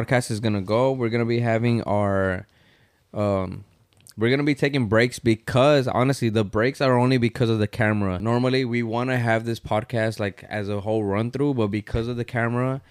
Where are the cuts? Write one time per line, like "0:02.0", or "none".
none